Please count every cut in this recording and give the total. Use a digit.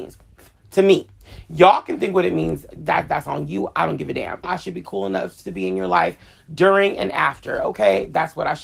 1